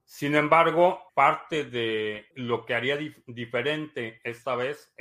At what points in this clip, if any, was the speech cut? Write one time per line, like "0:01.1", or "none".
0:01.1
0:02.3

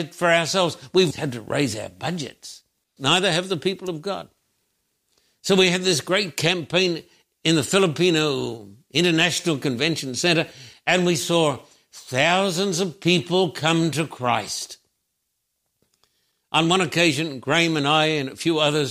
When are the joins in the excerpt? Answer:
0:01.1
0:03.0

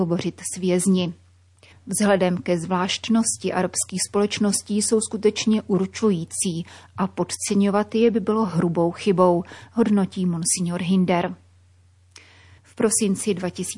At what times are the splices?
0:01.7
0:12.6

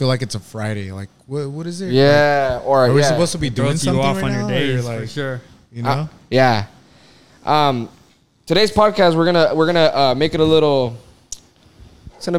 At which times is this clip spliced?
none

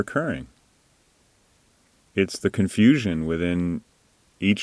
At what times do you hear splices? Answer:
none

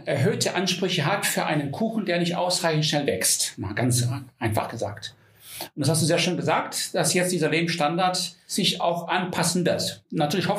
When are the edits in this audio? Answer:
none

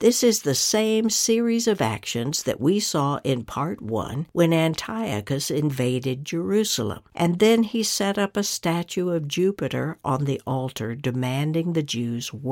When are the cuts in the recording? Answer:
0:07.1

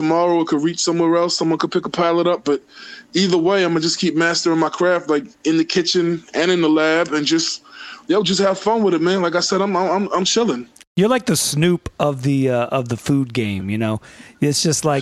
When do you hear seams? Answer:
none

